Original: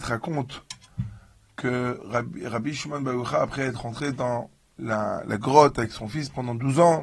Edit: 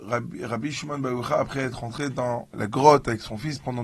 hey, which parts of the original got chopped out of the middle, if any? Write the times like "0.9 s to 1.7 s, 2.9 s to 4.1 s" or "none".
4.6 s to 5.2 s